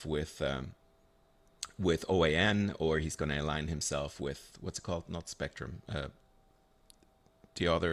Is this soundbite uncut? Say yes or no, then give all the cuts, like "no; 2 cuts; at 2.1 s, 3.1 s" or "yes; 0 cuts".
yes; 0 cuts